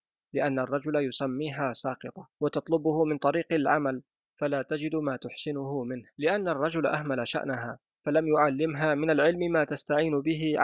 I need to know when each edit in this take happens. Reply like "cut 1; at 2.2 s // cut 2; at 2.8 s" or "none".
cut 1; at 2.3 s // cut 2; at 6.1 s